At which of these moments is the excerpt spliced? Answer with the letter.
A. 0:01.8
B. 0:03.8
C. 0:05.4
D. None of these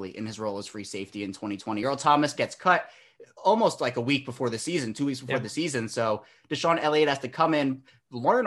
D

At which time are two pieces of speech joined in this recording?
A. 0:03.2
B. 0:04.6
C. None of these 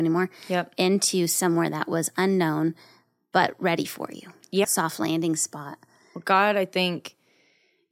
B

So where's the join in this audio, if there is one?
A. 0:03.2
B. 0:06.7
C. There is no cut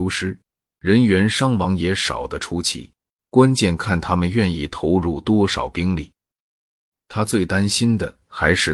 A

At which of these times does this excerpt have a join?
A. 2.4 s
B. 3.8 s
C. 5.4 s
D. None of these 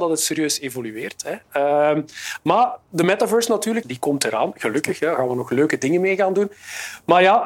B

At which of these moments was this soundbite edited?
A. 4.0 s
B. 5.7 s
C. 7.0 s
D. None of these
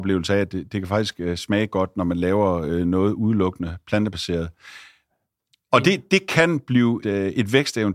C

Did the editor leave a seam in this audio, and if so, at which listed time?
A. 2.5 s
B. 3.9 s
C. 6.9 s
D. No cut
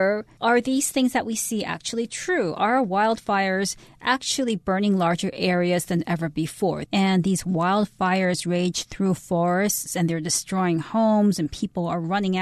C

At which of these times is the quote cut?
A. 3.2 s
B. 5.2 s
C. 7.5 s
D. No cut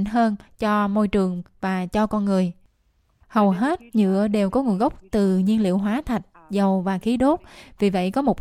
A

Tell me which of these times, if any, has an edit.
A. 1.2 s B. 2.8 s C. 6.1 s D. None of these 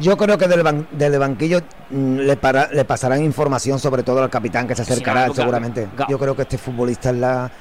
C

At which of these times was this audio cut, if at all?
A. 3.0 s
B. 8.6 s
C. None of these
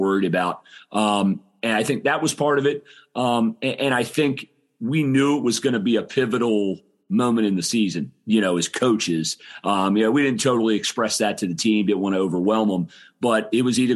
C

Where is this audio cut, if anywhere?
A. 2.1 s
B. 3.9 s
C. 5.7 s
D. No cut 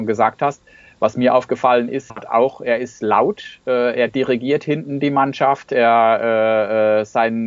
A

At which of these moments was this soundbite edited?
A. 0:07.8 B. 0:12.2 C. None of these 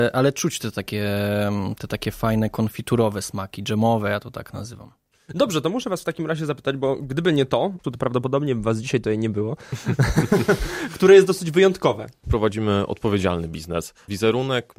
A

